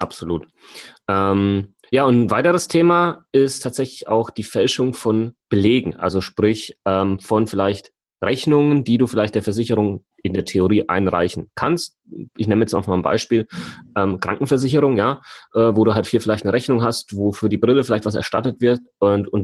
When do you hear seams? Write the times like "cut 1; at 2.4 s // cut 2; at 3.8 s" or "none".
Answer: none